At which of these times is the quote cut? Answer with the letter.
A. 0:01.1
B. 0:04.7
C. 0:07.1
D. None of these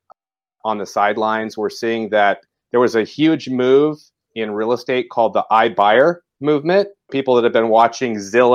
C